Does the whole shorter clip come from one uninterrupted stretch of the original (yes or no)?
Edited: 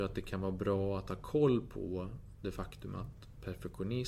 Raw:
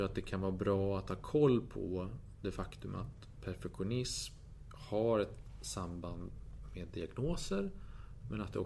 yes